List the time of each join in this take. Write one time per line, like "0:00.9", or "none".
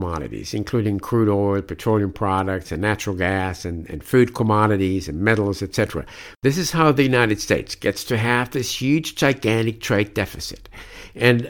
0:06.3